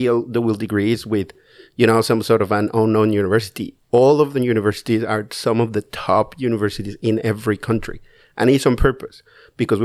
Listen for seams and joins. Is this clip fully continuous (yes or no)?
yes